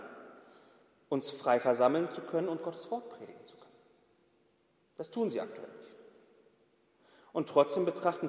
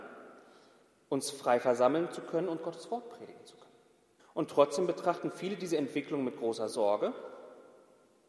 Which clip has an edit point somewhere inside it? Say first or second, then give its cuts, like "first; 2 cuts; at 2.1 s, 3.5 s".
second; 1 cut; at 4.2 s